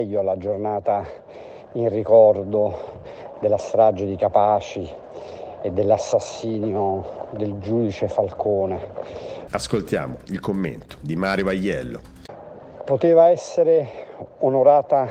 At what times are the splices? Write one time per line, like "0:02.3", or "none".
0:09.5